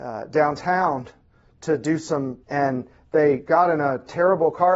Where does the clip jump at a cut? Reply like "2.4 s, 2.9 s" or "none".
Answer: 2.4 s